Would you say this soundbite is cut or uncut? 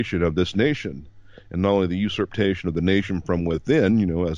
uncut